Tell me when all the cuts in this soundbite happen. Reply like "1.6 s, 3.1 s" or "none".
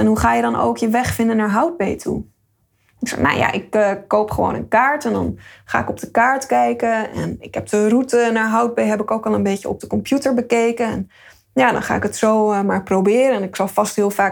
none